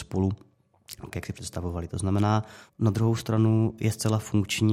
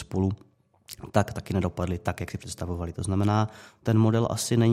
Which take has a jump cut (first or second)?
first